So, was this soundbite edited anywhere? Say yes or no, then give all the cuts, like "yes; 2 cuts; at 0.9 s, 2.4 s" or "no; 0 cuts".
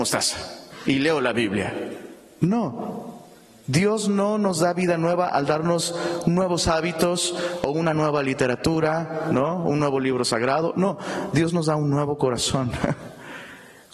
no; 0 cuts